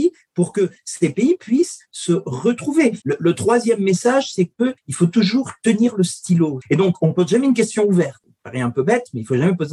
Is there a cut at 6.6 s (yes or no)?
yes